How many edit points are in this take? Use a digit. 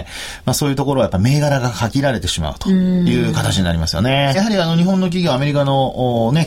1